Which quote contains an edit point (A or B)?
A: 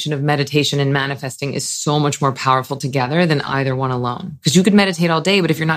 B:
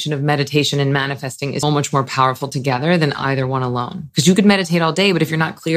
B